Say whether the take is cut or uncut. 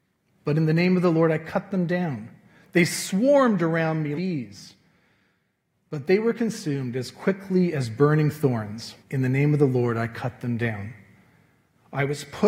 cut